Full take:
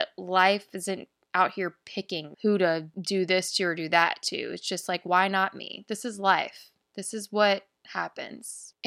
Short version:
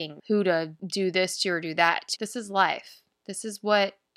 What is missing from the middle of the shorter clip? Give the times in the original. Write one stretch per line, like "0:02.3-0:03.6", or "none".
0:04.3-0:05.8